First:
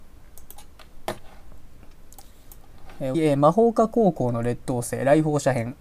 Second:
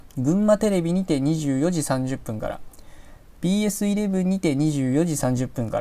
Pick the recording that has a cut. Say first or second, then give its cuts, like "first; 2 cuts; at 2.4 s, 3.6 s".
first; 1 cut; at 3.1 s